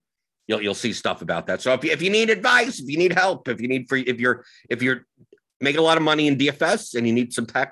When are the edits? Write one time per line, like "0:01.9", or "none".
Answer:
0:04.0